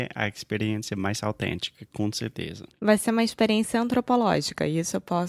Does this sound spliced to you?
no; 0 cuts

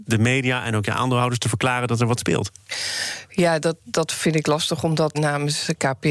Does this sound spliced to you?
yes; 1 cut; at 5.1 s

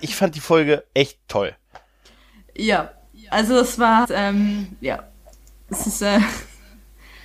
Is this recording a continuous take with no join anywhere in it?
no; 1 cut; at 4.0 s

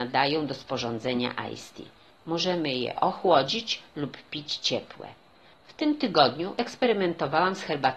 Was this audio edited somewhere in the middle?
yes; 2 cuts; at 2.1 s, 5.5 s

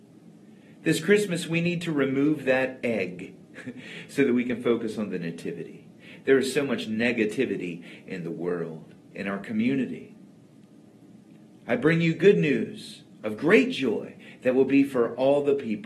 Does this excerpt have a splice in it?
yes; 1 cut; at 9.1 s

